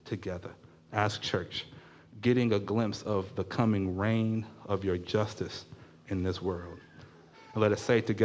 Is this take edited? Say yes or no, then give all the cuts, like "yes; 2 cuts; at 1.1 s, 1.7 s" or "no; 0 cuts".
yes; 1 cut; at 7.3 s